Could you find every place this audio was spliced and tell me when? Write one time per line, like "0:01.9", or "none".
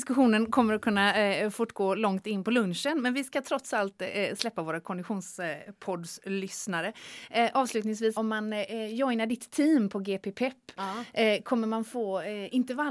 0:08.2